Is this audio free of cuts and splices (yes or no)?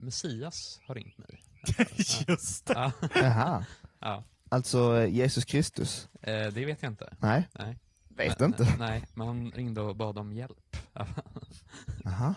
yes